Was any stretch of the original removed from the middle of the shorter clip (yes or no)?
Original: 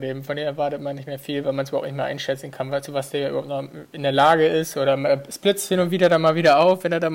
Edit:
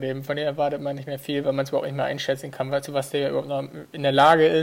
no